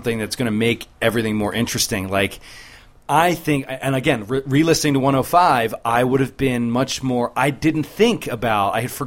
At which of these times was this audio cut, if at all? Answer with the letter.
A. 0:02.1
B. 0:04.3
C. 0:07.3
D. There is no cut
D